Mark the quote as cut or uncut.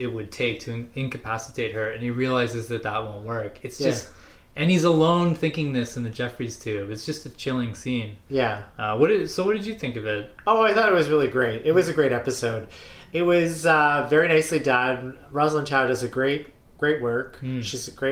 uncut